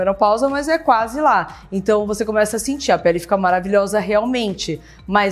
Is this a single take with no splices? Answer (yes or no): yes